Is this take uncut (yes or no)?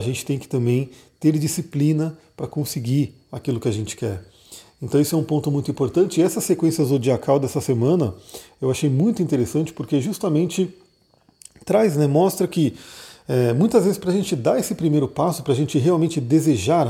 yes